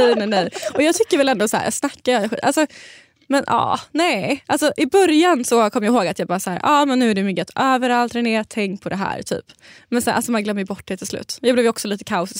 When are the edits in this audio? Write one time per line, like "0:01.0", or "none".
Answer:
none

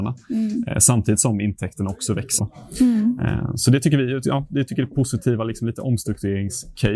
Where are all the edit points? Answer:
0:02.4

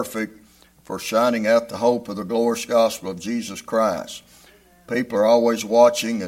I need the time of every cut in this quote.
none

